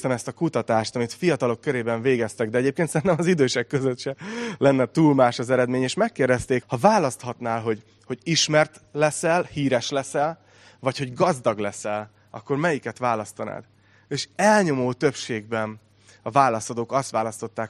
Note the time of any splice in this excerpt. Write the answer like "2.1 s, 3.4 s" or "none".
6.6 s

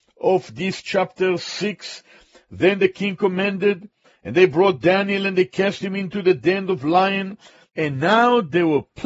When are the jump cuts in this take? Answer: 7.7 s

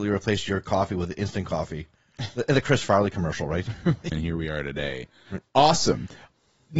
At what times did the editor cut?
4.1 s, 5.4 s

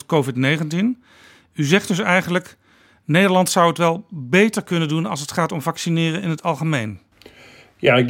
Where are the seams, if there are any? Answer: none

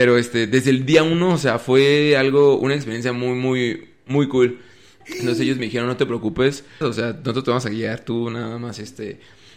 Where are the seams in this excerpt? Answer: 5.0 s, 6.8 s

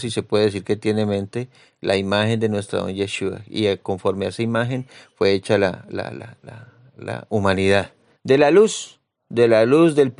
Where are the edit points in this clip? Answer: 8.2 s

